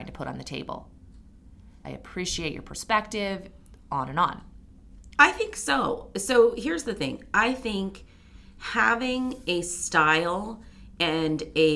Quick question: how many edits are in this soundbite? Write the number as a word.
two